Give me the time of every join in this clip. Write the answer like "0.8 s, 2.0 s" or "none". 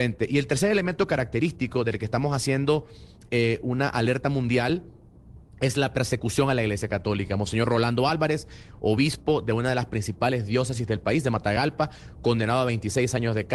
none